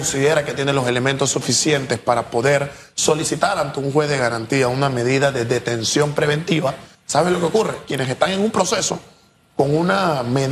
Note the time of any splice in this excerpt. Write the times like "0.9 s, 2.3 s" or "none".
6.9 s